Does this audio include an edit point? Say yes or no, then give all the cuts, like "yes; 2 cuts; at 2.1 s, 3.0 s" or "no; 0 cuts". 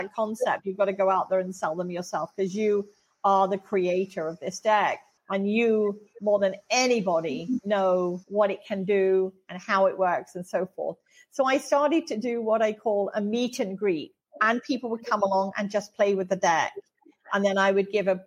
yes; 2 cuts; at 8.2 s, 14.3 s